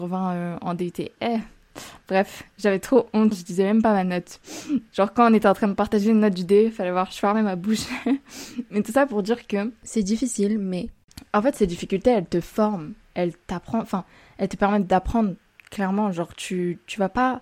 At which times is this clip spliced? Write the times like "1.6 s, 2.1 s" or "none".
3.3 s